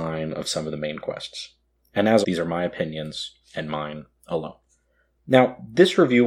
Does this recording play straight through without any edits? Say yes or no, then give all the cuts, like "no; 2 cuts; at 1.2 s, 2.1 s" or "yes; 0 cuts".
no; 2 cuts; at 2.2 s, 5.2 s